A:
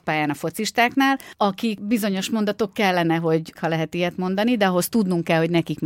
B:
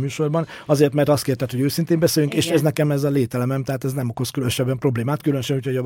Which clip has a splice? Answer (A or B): A